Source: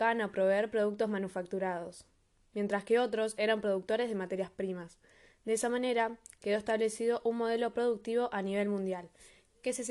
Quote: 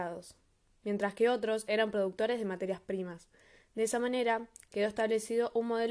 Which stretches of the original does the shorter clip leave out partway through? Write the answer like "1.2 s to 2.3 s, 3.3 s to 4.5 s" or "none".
none